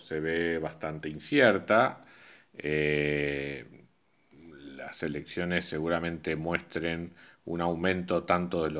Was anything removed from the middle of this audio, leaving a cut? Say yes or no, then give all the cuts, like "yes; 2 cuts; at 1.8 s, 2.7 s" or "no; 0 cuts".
no; 0 cuts